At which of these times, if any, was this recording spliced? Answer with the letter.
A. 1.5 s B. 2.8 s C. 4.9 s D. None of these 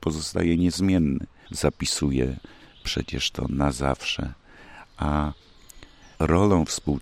A